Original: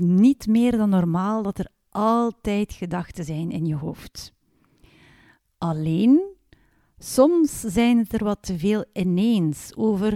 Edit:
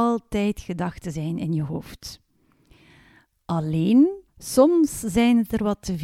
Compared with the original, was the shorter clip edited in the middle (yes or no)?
yes